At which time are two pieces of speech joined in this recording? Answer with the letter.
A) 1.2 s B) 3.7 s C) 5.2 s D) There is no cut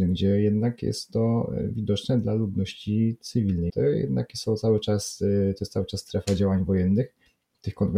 B